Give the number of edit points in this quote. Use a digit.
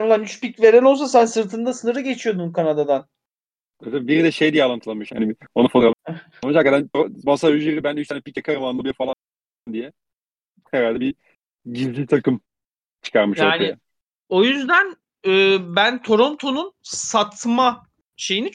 1